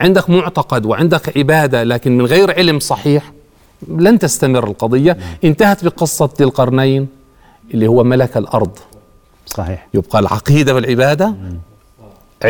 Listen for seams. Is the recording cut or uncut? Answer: uncut